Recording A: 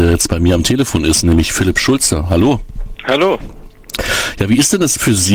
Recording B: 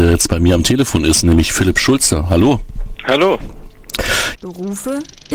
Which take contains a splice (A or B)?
B